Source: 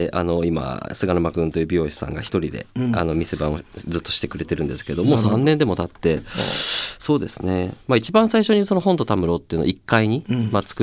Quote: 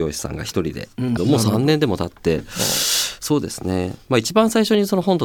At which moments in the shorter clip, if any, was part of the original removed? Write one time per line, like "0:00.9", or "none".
0:01.2

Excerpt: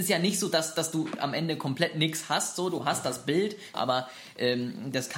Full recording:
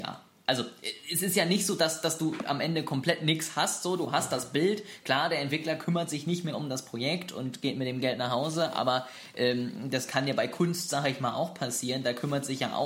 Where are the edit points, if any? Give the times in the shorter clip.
0:03.7

